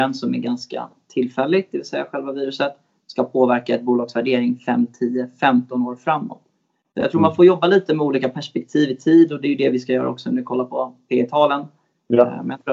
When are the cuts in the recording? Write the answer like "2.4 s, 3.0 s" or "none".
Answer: none